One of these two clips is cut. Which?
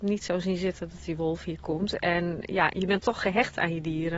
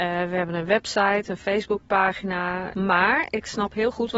second; 1 cut; at 2.7 s

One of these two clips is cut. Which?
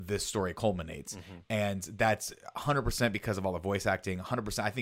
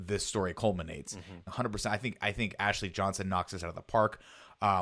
second; 1 cut; at 1.5 s

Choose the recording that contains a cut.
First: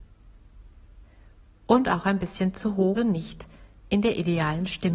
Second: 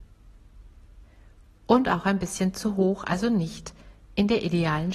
first; 1 cut; at 3.0 s

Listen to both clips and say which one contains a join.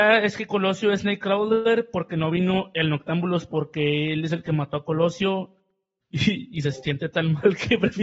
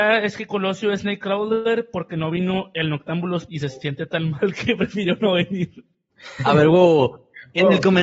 second; 1 cut; at 3.5 s

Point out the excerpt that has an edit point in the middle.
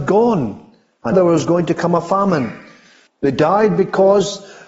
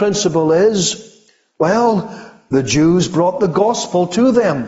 first; 2 cuts; at 1.1 s, 3.1 s

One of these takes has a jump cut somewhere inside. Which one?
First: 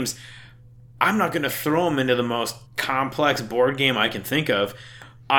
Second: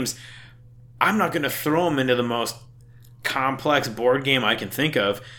first; 1 cut; at 2.7 s

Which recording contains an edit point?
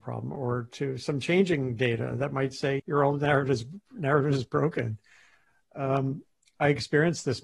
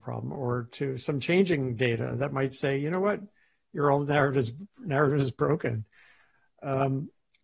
first; 1 cut; at 2.8 s

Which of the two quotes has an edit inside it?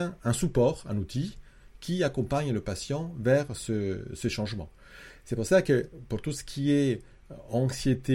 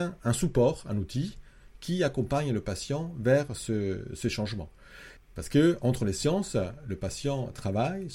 second; 1 cut; at 5.2 s

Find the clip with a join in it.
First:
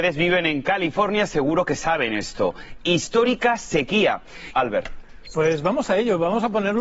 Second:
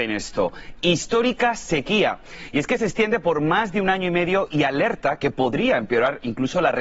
first; 1 cut; at 4.5 s

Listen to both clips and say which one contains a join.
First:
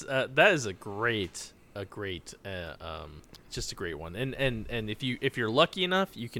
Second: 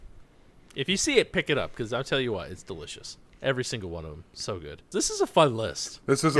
second; 1 cut; at 4.9 s

